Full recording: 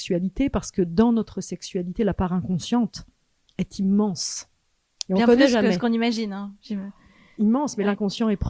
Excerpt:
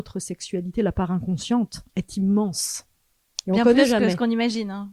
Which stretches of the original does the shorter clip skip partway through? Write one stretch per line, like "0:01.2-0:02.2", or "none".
0:03.1-0:03.5